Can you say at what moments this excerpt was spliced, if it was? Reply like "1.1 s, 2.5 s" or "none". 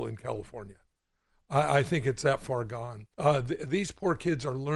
3.1 s

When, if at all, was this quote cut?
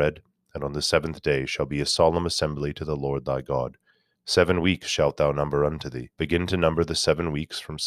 4.2 s, 6.1 s

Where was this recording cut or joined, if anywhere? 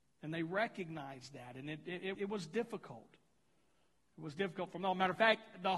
2.1 s

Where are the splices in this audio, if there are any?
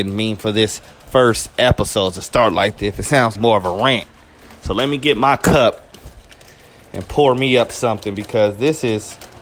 3.4 s

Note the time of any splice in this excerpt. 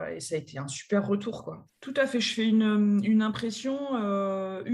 1.7 s

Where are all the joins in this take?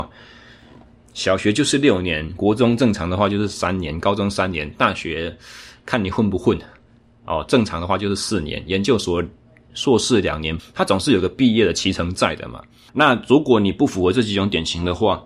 1.0 s, 10.6 s, 12.9 s

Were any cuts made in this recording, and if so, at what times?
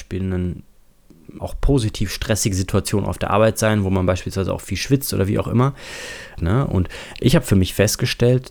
1.4 s, 6.4 s

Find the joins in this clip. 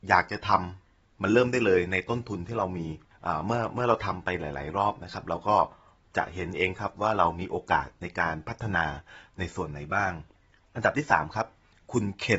none

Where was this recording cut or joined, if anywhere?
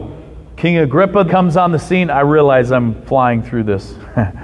1.3 s

